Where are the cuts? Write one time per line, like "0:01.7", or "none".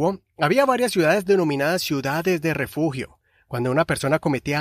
none